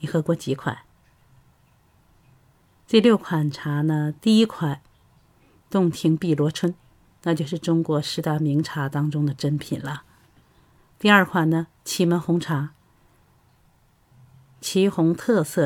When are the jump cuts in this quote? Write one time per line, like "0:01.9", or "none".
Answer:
none